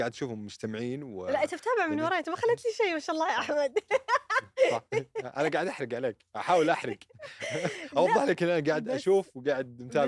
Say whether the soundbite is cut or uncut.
uncut